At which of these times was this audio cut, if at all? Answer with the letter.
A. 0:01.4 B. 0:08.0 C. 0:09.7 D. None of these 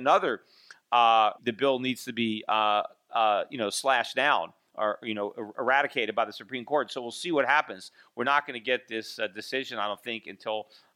A